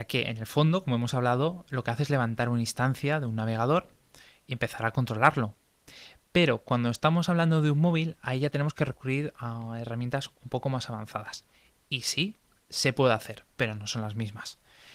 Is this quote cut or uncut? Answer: uncut